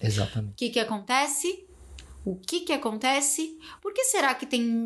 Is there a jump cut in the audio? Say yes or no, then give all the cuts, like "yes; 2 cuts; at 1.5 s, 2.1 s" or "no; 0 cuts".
no; 0 cuts